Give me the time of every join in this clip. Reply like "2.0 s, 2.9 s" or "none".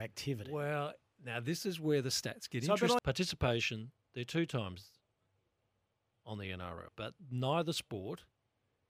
3.0 s, 6.9 s